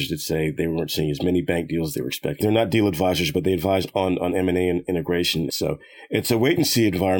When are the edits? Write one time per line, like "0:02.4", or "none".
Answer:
0:02.4
0:05.5